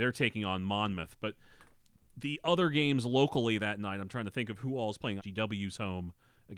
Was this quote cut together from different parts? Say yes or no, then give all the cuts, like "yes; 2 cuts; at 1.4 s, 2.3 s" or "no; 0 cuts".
yes; 1 cut; at 5.2 s